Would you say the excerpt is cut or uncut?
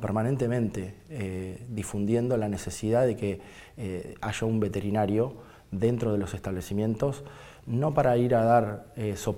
uncut